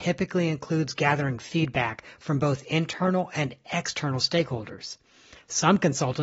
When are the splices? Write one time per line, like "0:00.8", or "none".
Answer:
none

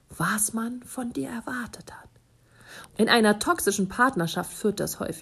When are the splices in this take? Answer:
0:02.9

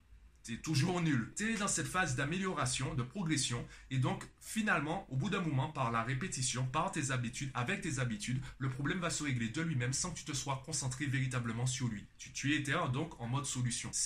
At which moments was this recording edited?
none

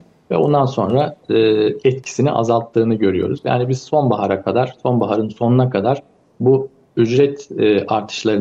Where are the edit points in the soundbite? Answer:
none

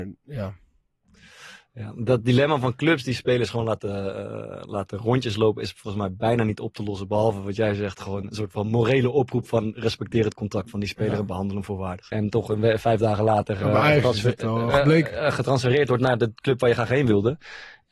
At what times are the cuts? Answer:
0:12.1

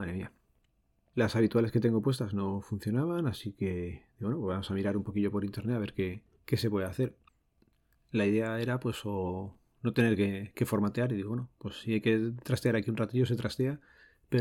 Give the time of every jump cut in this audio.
none

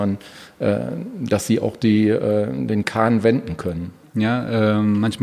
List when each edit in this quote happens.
0:04.0

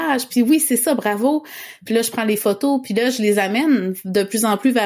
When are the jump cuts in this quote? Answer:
none

